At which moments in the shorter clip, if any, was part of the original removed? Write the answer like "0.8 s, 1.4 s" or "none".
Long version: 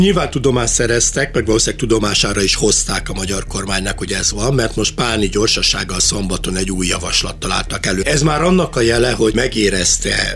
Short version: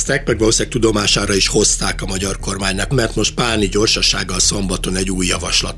2.9 s